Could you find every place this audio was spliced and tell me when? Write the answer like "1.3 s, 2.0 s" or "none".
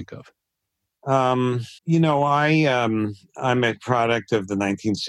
1.8 s

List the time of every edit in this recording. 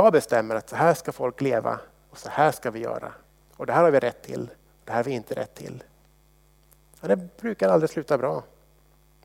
none

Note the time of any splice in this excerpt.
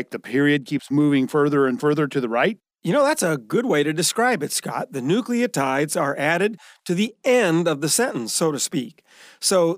none

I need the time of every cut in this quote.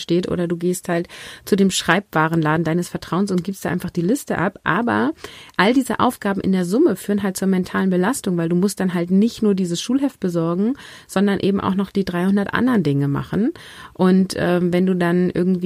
none

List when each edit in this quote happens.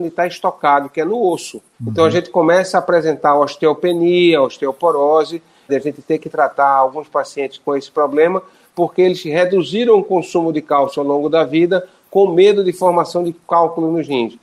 1.7 s, 5.7 s

